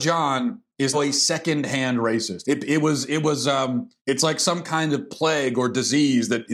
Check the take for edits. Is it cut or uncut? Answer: cut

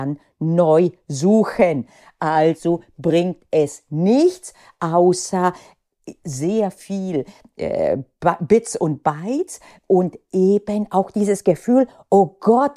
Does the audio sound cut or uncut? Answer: uncut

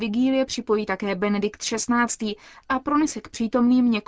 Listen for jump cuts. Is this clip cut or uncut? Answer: uncut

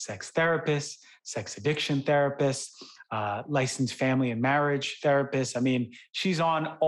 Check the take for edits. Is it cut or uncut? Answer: uncut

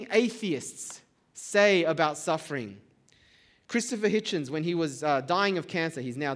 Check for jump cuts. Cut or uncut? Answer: uncut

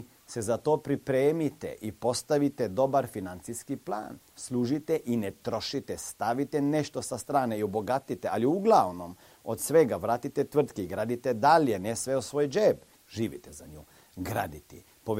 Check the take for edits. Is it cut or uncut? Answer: cut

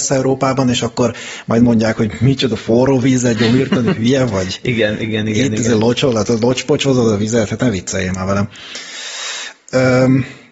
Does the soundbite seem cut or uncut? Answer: uncut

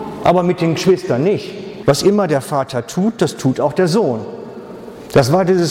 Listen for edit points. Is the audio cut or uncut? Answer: cut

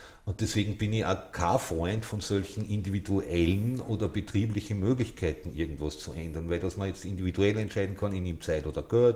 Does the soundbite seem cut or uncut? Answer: uncut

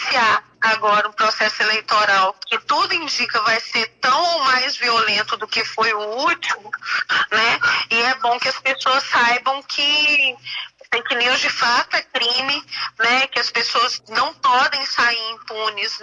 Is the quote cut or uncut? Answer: uncut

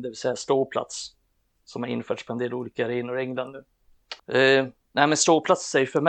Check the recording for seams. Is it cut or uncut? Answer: cut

